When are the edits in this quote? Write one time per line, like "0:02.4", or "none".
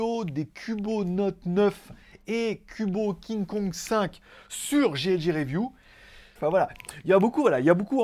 0:06.4